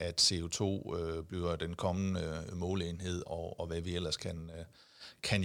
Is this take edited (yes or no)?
yes